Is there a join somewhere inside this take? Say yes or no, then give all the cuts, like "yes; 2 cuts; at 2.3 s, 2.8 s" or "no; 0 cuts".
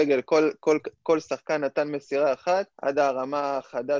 yes; 1 cut; at 2.7 s